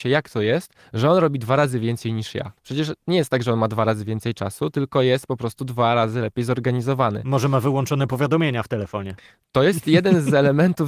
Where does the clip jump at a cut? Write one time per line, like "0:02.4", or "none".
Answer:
0:02.6